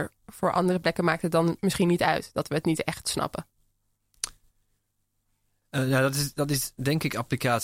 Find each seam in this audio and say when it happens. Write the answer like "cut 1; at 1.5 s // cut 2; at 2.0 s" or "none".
none